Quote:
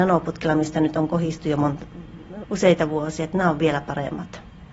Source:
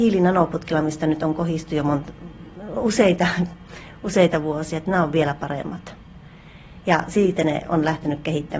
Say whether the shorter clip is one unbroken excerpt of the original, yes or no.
no